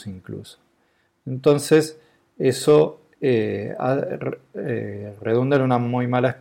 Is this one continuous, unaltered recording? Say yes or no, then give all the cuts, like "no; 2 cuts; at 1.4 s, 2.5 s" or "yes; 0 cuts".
yes; 0 cuts